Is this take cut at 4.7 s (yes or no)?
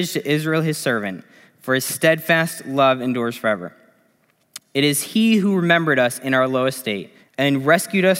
no